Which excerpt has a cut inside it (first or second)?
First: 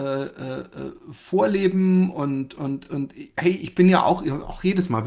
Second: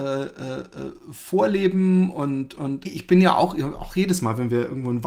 second